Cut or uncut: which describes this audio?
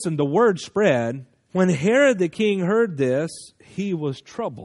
cut